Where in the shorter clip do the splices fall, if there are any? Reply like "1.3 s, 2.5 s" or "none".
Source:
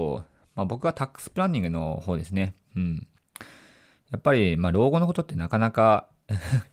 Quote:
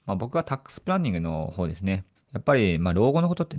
2.2 s

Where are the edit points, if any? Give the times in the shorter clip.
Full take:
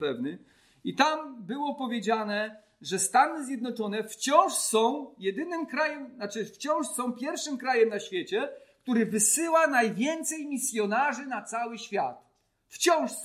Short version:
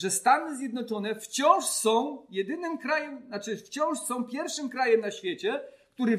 none

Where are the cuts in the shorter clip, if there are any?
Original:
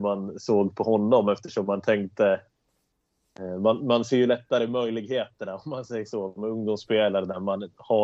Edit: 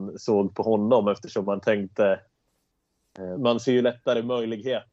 3.4 s

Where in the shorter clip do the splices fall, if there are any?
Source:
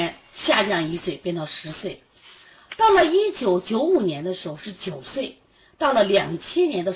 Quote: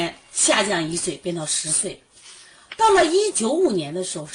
3.3 s

